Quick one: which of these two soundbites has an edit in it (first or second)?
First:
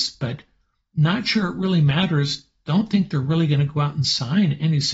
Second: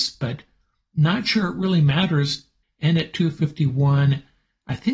second